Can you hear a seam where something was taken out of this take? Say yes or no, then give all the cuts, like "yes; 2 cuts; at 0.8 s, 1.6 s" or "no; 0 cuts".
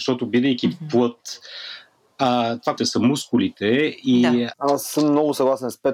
yes; 2 cuts; at 2.8 s, 4.5 s